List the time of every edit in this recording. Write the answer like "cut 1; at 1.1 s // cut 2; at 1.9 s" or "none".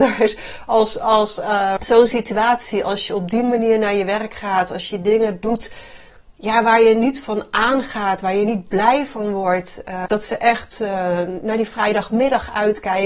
cut 1; at 1.8 s // cut 2; at 10.1 s